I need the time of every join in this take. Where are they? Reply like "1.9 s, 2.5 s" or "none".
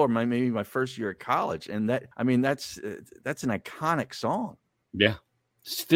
2.1 s

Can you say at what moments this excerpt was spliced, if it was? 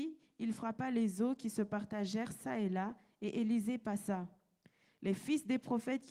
none

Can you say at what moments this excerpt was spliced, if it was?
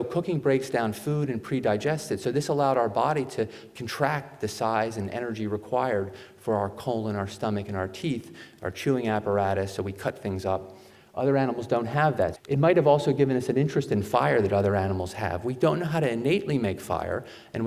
12.3 s

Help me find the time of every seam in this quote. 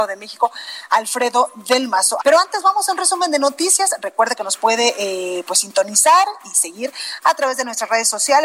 2.2 s

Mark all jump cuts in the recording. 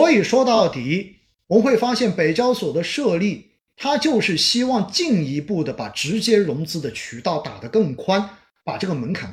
none

